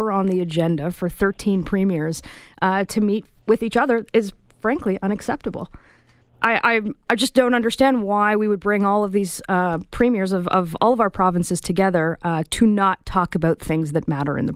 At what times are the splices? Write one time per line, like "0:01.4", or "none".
none